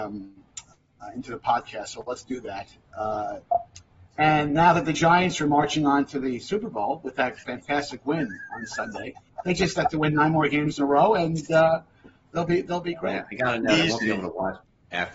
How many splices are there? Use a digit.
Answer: 1